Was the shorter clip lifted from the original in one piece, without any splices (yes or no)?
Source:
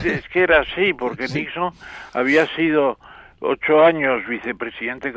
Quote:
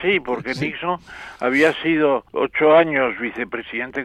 no